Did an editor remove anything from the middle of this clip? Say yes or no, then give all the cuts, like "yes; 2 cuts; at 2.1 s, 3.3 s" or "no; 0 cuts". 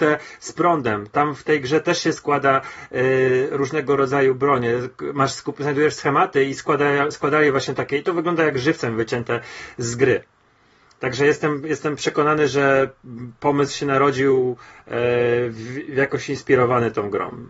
no; 0 cuts